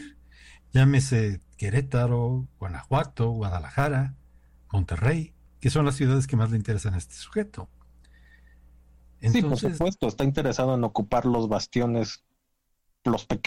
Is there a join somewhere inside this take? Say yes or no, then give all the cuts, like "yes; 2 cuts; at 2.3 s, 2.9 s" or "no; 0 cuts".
no; 0 cuts